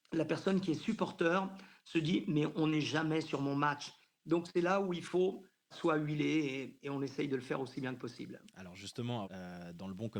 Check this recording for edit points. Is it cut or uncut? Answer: cut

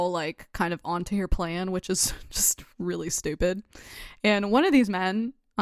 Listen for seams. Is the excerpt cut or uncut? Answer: cut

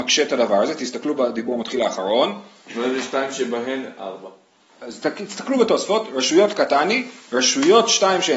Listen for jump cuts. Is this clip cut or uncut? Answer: cut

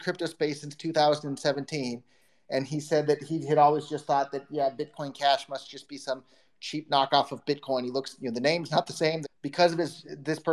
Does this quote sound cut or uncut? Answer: cut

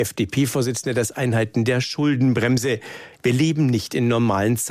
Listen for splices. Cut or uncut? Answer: cut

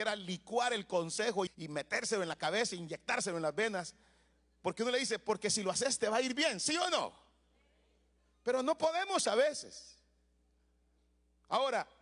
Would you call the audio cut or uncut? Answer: cut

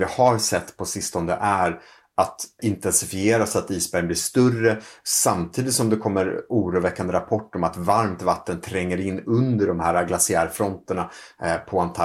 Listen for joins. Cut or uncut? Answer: cut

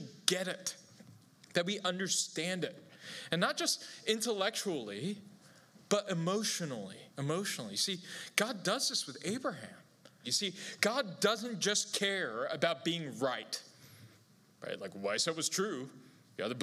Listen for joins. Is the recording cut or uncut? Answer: cut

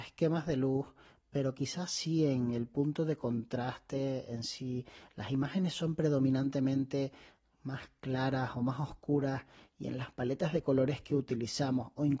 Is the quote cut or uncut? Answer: uncut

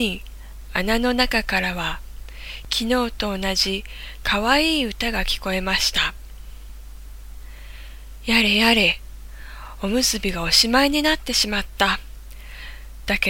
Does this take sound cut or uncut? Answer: uncut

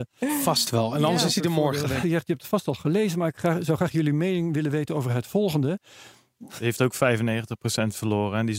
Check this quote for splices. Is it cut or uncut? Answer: cut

